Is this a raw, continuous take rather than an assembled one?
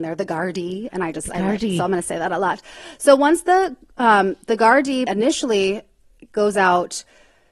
no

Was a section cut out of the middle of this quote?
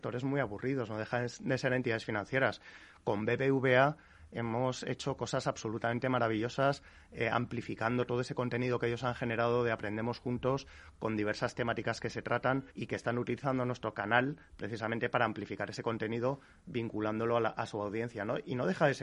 yes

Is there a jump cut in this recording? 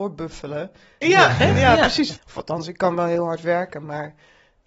yes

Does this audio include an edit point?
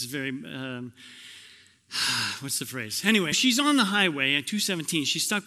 yes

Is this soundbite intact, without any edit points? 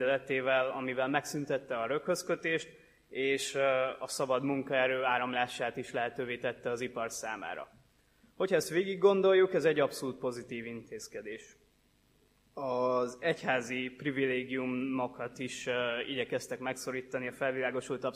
yes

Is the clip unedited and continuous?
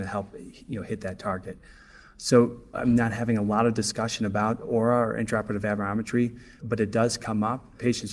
no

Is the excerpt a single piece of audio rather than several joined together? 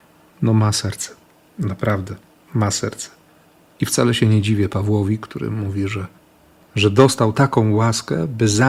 yes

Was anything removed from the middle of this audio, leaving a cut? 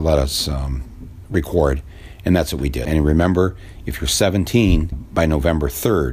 yes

